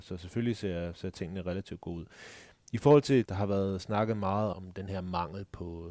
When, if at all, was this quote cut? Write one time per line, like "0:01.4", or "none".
0:03.2
0:04.5